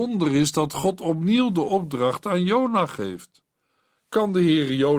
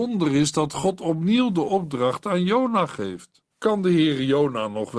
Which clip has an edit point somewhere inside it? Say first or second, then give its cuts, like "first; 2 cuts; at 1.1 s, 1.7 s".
second; 1 cut; at 3.5 s